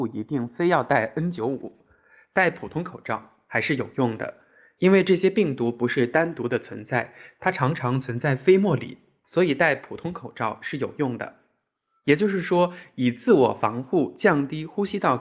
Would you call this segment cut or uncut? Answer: cut